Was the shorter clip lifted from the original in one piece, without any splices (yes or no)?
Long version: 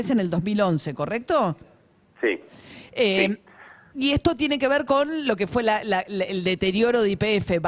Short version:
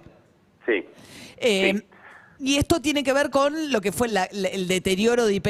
no